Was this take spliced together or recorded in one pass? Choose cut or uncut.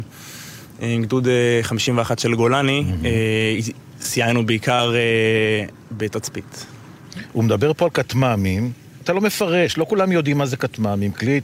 cut